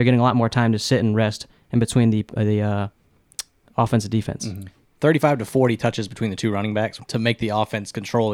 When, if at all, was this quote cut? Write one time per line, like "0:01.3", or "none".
0:04.8
0:07.0